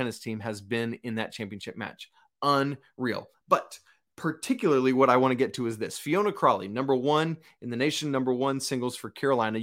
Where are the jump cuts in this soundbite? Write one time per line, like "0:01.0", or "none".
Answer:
none